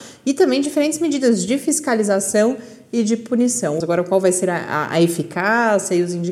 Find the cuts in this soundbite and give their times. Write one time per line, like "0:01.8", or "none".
0:03.8